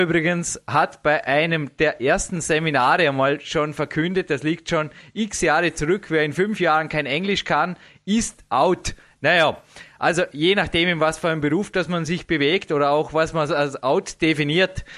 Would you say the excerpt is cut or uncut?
uncut